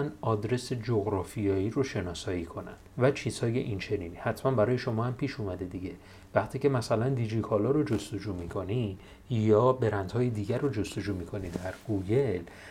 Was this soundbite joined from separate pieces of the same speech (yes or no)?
yes